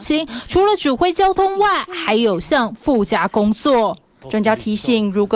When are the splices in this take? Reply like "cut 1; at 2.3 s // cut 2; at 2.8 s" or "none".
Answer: cut 1; at 4.2 s